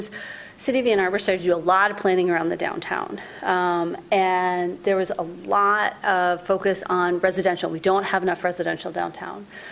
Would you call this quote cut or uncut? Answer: uncut